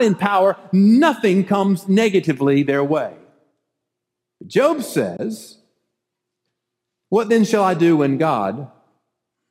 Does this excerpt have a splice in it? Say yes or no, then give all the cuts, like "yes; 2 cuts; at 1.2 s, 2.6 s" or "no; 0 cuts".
no; 0 cuts